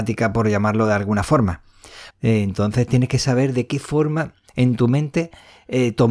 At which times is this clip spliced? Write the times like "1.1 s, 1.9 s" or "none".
2.1 s

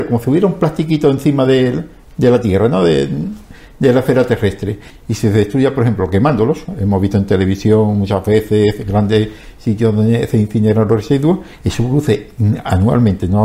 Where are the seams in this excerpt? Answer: 4.9 s

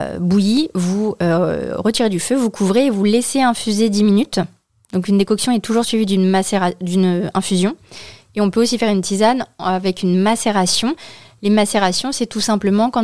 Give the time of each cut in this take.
none

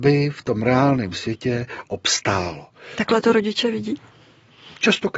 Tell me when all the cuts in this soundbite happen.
none

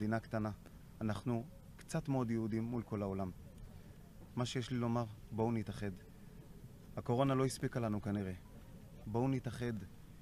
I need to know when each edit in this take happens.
9.0 s

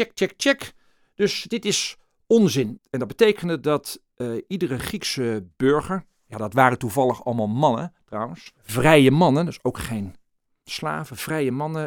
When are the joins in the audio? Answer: 2.8 s, 8.6 s

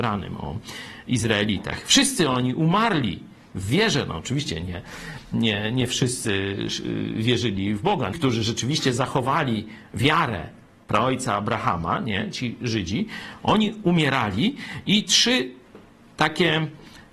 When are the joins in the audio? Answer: 8.1 s

